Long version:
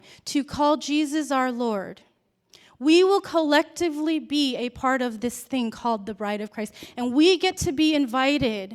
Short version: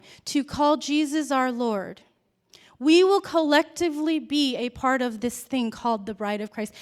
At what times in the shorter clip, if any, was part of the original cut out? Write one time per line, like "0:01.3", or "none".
none